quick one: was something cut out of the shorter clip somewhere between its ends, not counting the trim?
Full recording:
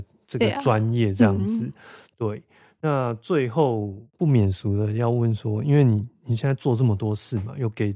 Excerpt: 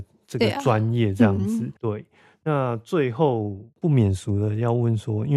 yes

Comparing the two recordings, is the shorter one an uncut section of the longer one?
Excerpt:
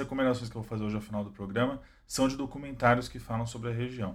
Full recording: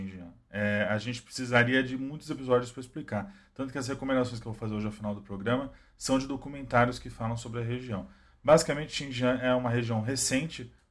yes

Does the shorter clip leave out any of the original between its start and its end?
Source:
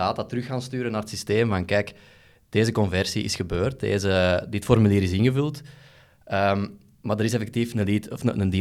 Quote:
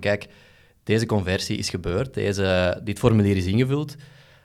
no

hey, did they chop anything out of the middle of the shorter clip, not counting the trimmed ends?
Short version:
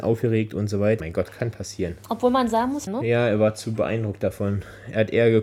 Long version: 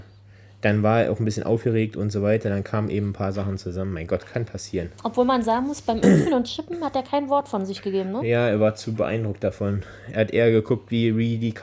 yes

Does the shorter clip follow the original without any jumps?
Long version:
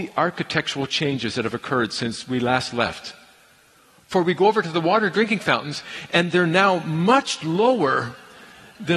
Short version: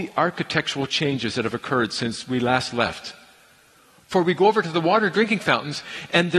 yes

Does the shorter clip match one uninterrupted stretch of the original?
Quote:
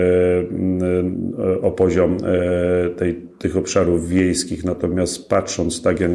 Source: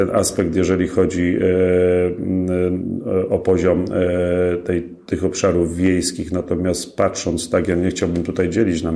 yes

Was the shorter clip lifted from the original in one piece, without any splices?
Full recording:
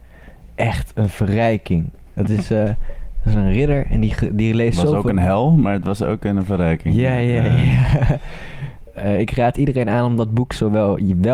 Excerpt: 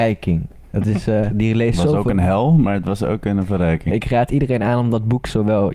no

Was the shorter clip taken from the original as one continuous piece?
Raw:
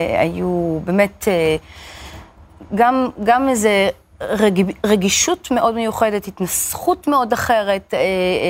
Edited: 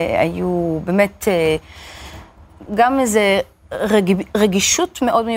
no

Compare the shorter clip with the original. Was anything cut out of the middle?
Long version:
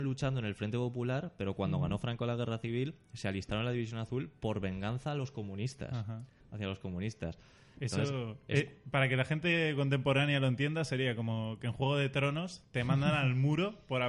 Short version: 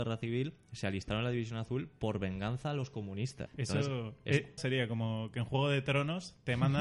yes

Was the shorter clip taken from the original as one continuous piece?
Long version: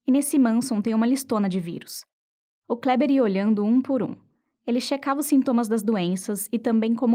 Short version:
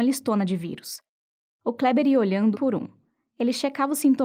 no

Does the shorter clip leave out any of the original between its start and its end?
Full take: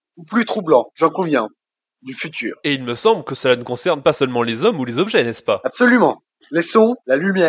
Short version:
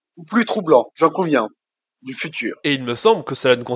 no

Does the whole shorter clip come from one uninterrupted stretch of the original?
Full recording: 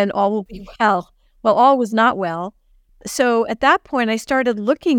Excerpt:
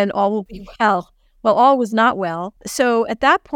no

